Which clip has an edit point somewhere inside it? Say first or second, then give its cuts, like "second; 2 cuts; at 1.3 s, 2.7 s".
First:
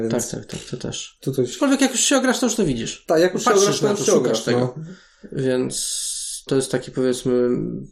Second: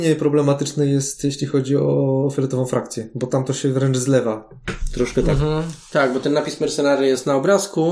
first; 1 cut; at 6.5 s